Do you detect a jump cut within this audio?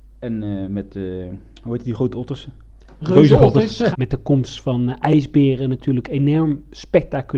yes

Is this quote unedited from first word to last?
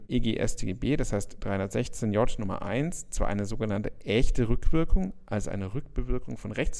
yes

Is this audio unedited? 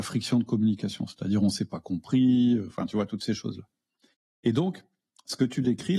yes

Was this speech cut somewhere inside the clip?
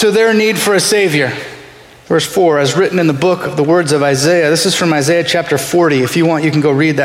yes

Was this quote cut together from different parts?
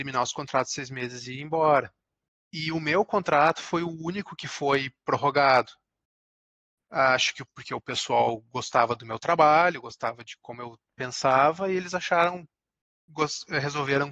no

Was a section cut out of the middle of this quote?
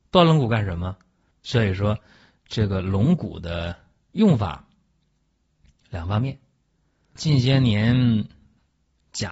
yes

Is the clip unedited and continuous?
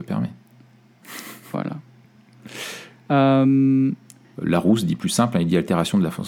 no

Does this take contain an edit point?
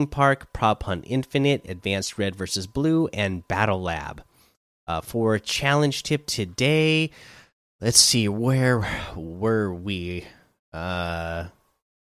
no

